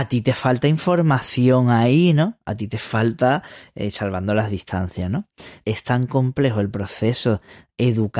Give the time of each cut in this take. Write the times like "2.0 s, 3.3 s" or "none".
5.6 s